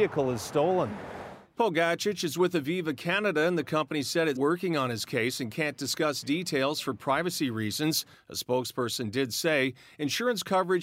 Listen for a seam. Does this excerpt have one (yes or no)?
yes